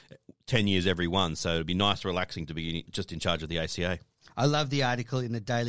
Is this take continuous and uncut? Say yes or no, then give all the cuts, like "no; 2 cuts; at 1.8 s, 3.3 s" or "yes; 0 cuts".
no; 1 cut; at 2.9 s